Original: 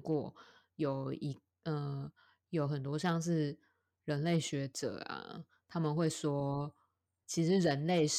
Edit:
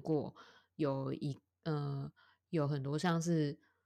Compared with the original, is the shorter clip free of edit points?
yes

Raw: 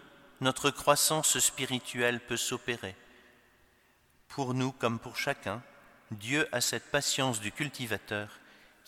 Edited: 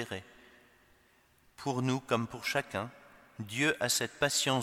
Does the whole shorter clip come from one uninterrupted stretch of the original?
yes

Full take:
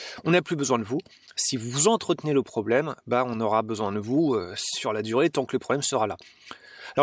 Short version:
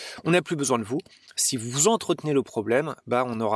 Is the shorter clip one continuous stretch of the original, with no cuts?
yes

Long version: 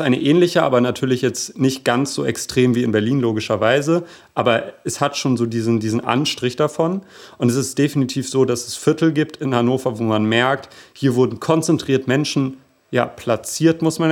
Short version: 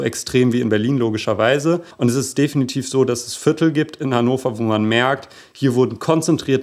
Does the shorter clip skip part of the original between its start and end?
yes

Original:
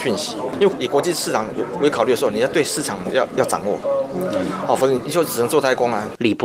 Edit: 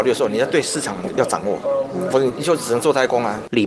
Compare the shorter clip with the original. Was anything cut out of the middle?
yes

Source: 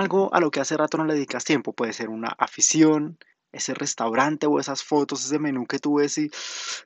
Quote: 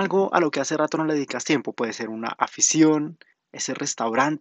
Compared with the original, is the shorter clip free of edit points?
yes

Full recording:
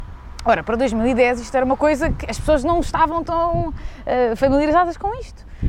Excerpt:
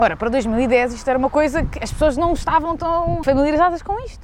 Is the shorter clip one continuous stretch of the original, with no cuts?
no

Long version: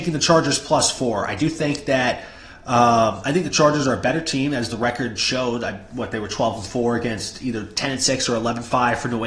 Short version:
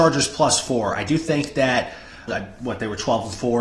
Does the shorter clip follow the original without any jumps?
no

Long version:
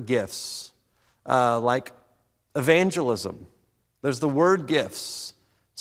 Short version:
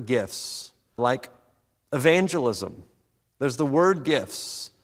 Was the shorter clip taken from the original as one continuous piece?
no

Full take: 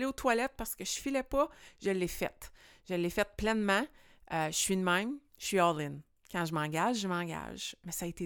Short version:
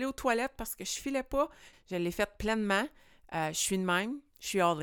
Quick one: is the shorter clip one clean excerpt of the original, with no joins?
no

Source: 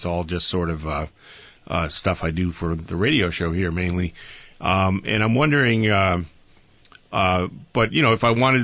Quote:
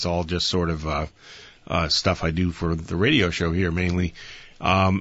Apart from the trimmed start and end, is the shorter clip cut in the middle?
no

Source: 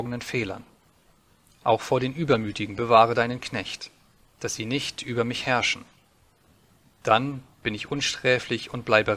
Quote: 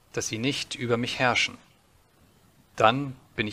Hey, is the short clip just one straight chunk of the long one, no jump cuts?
yes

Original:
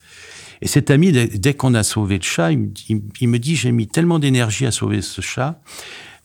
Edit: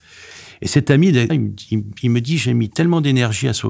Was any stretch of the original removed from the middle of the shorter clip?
yes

